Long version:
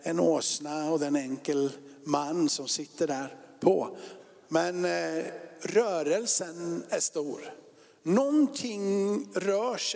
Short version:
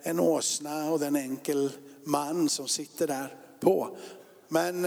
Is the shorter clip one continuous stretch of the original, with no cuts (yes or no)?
yes